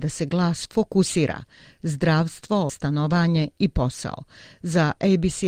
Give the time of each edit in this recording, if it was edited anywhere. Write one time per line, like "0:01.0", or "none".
0:02.7